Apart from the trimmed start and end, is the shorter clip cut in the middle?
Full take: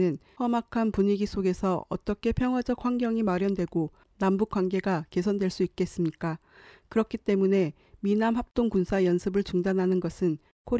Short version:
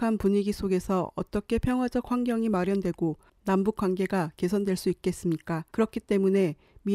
yes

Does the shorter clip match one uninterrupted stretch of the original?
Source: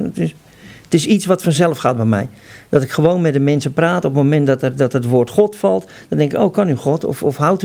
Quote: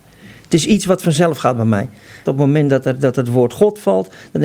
no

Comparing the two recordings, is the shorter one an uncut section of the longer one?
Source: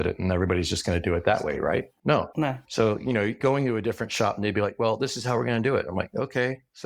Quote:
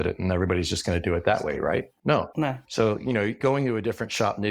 yes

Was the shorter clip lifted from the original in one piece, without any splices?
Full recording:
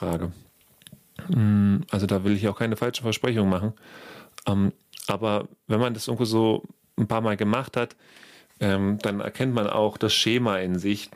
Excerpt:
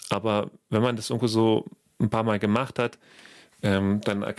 yes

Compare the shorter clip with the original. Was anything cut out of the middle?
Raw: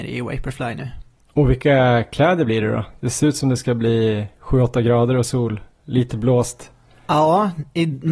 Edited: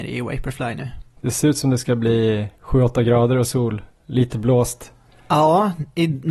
yes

